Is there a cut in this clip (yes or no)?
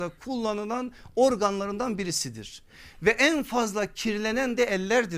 no